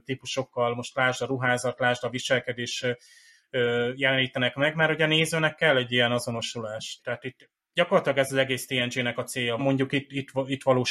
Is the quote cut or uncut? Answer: cut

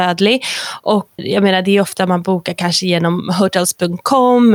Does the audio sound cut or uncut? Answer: cut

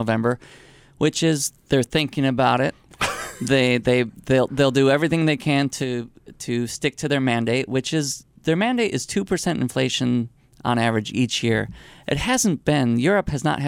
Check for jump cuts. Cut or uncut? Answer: uncut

